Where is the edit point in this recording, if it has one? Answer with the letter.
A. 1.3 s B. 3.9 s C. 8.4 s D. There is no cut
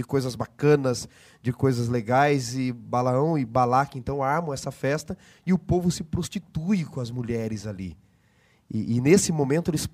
D